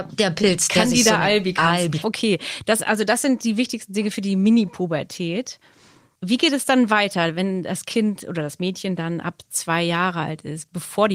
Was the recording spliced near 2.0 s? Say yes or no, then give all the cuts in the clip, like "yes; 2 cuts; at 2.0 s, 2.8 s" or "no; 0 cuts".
yes; 1 cut; at 2.0 s